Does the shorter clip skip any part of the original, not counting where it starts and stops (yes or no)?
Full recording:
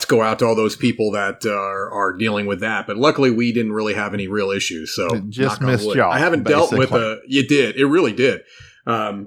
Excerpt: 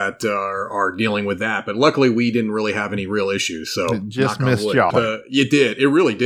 yes